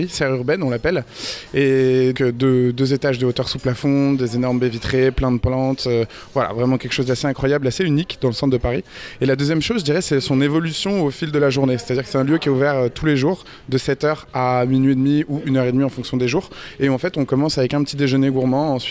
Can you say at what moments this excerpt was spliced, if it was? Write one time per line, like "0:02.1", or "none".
0:02.1